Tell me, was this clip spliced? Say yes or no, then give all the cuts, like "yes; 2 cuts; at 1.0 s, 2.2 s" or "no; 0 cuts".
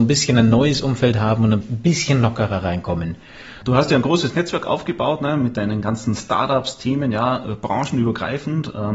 yes; 2 cuts; at 1.6 s, 3.6 s